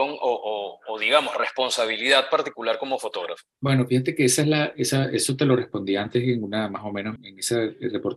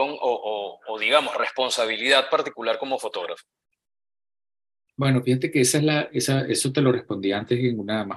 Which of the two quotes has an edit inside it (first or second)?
first